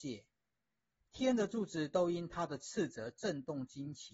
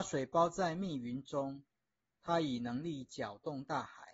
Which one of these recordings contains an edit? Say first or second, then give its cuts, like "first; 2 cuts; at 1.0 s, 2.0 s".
second; 1 cut; at 2.2 s